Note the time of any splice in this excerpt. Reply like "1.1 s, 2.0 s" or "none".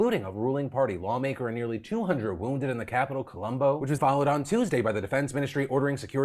4.0 s